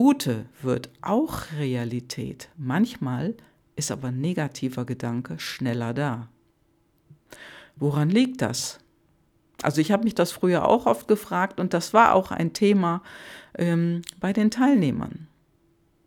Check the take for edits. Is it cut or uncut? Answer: uncut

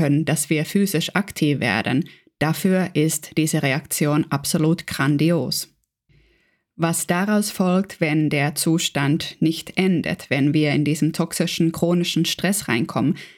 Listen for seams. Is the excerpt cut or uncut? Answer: uncut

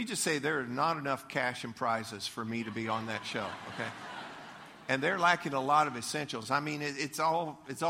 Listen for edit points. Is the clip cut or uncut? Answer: uncut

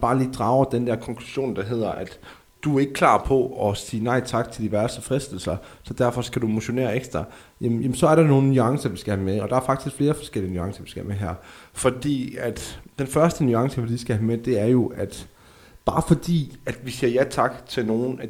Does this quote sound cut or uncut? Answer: uncut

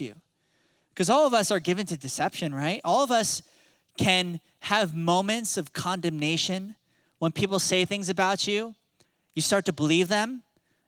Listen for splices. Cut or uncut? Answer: uncut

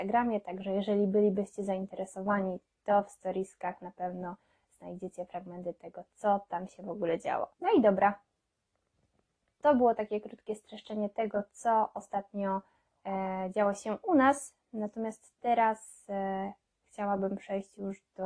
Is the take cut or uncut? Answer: cut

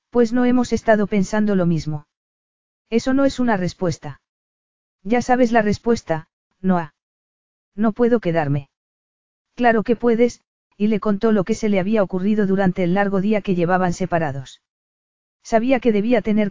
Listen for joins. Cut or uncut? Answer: uncut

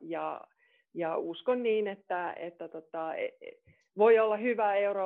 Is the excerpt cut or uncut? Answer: uncut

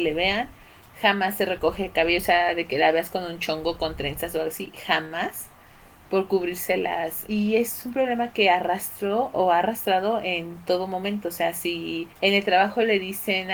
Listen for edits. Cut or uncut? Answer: cut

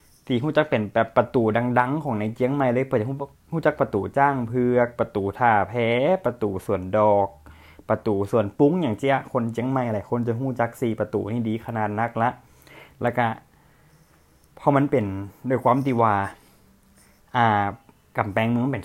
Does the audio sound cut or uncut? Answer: uncut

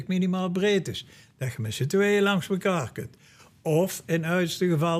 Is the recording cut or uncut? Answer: uncut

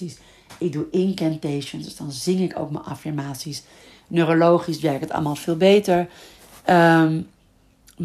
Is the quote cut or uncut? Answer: uncut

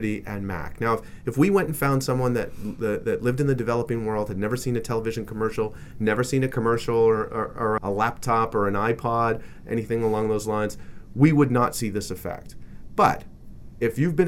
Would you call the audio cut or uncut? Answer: cut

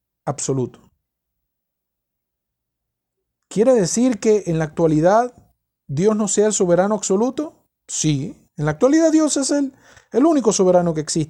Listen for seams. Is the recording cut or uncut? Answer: uncut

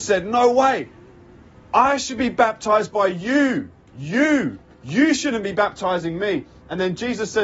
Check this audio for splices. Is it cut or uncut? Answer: uncut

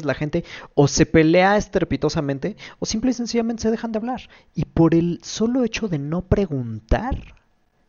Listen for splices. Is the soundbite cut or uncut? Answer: uncut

